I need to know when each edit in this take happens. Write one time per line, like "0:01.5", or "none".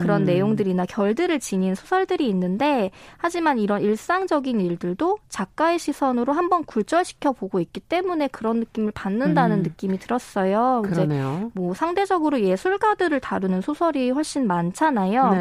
none